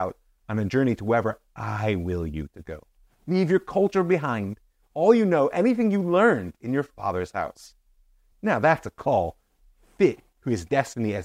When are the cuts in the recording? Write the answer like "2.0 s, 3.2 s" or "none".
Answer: none